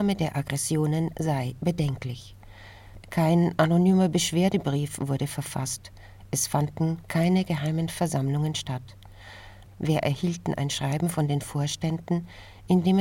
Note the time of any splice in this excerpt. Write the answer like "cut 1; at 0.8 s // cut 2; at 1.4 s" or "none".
cut 1; at 3.0 s // cut 2; at 9.6 s